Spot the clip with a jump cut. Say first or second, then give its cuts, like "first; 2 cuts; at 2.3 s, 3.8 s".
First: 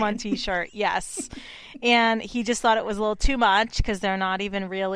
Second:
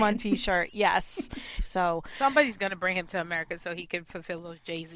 second; 1 cut; at 1.6 s